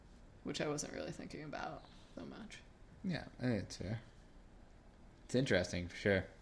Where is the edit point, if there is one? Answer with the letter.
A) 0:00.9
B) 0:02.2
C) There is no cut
B